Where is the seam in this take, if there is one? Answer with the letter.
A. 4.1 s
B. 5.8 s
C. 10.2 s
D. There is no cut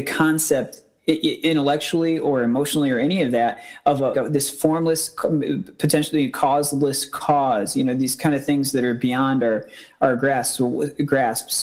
A